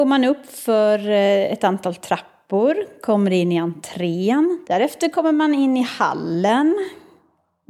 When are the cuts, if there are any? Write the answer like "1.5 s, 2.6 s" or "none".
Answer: 4.6 s